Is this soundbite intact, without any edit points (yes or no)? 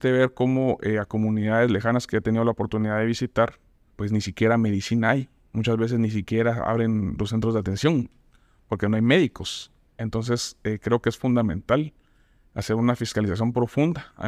no